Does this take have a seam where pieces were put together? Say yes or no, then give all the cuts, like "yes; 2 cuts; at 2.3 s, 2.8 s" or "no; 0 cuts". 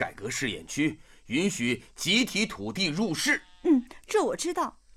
no; 0 cuts